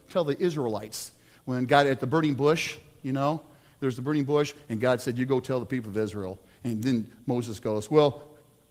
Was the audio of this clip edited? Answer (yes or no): no